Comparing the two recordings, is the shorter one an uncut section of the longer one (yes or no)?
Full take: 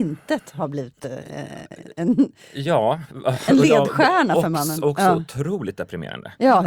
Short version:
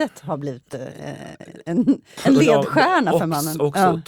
no